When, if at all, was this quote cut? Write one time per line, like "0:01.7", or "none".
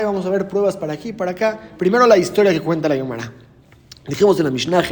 none